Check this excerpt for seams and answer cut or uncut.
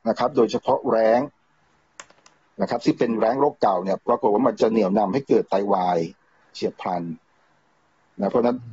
uncut